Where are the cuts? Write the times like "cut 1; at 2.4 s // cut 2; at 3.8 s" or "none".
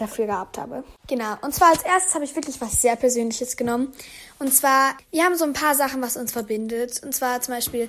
cut 1; at 5.0 s